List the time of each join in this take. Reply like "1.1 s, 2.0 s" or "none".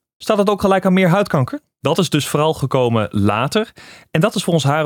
1.8 s